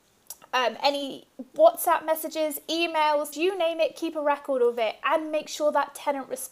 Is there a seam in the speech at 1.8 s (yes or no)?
no